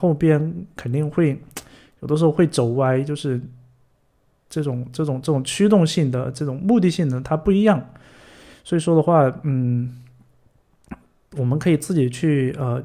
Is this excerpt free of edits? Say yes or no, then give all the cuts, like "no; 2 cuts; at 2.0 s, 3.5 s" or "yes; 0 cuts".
yes; 0 cuts